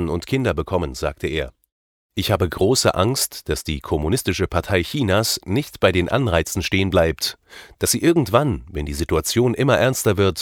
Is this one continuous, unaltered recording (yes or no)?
no